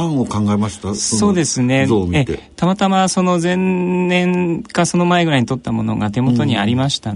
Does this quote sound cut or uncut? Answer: uncut